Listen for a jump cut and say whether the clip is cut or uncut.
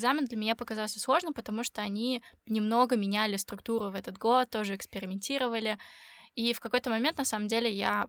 uncut